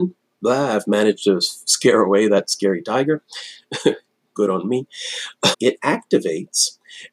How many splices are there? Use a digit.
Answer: 1